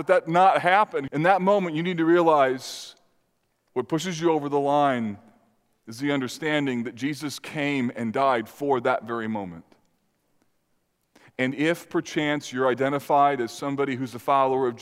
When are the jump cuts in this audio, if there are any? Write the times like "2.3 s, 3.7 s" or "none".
1.1 s